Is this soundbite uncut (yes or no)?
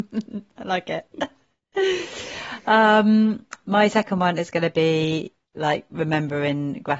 yes